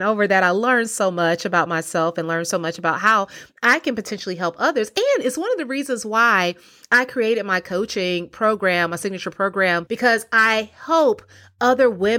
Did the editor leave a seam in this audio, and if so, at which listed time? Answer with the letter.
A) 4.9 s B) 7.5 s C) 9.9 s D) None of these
C